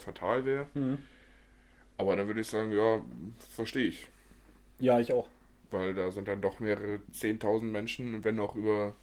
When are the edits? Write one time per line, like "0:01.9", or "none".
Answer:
none